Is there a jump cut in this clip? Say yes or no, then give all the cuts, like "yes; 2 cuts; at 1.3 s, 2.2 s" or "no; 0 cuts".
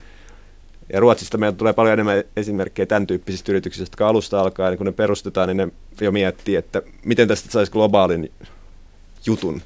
no; 0 cuts